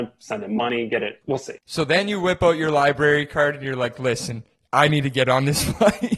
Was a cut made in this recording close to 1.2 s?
yes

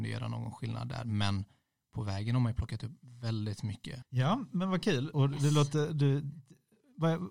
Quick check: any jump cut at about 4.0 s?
yes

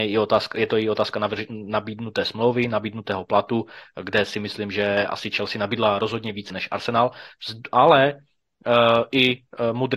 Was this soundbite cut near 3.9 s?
no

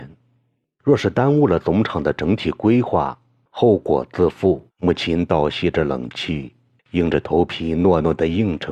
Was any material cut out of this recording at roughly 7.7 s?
no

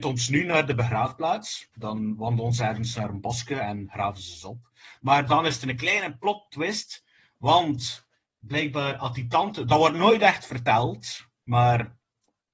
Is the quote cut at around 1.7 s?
yes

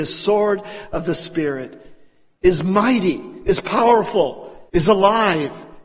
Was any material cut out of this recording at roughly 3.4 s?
no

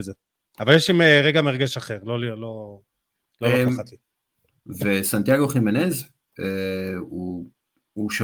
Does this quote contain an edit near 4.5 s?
yes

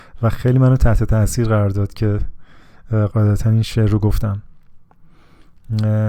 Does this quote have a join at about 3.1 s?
yes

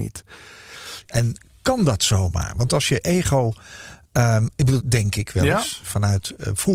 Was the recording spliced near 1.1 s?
yes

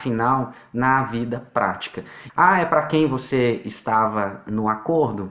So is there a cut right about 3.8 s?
no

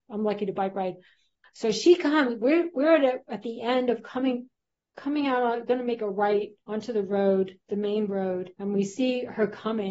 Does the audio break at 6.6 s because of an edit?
yes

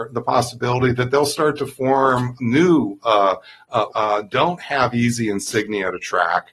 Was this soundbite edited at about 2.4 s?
yes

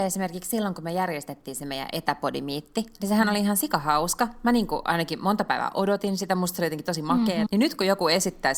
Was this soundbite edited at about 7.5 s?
yes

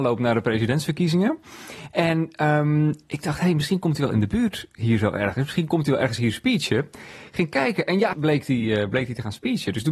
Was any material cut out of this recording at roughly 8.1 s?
yes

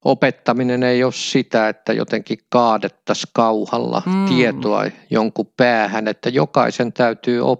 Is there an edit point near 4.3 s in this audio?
no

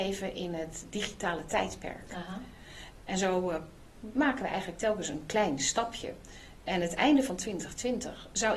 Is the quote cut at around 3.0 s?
yes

